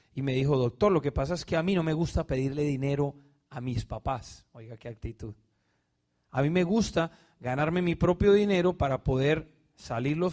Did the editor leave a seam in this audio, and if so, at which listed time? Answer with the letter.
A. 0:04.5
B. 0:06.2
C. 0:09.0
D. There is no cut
D